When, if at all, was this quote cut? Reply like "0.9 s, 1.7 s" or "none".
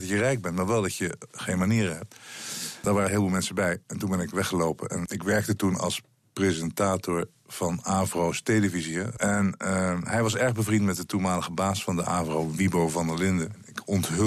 none